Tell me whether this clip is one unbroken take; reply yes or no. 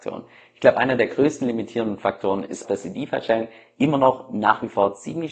no